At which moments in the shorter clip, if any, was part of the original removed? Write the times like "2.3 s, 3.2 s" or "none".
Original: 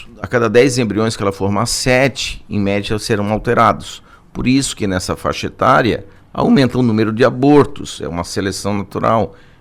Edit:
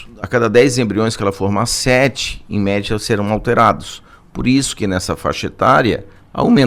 none